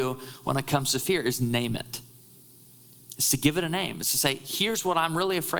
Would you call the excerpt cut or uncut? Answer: uncut